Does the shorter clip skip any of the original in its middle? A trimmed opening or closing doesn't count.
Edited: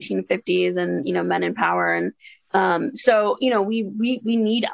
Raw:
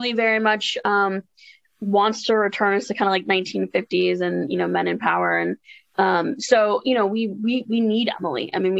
no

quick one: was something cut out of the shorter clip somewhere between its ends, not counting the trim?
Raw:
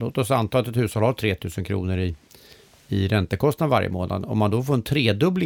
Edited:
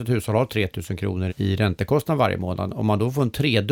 yes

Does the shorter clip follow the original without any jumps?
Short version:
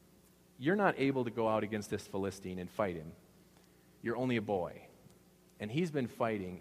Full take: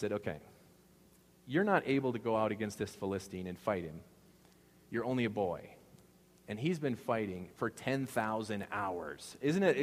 yes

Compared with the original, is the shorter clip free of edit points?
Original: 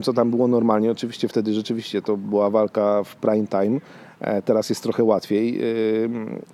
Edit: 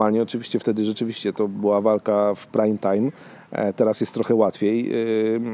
yes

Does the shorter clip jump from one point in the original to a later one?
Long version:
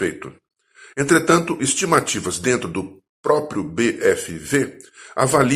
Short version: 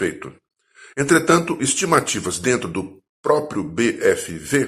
no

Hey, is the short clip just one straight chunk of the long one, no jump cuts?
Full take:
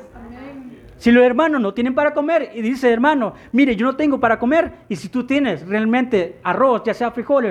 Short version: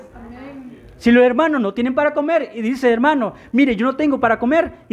yes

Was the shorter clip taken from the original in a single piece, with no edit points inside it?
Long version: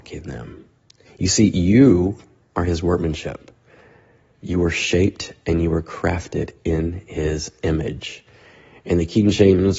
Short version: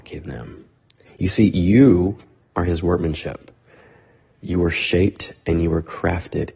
yes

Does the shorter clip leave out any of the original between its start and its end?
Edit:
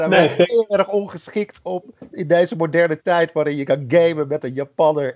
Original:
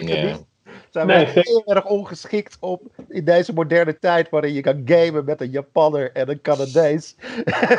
no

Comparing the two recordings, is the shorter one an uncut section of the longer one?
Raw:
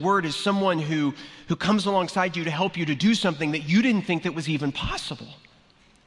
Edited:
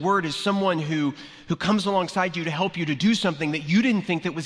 yes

